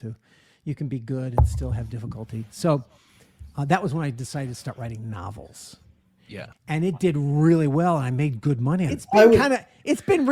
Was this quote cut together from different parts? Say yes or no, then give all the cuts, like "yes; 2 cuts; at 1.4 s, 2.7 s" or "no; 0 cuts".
yes; 2 cuts; at 6.5 s, 8.9 s